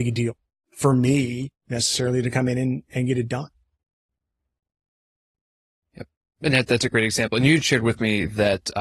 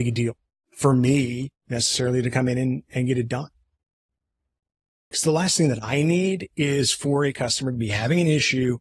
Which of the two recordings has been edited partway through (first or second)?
second